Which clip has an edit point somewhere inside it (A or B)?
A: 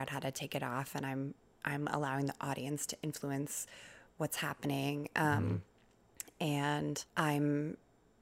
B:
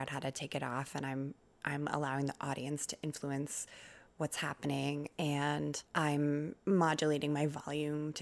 B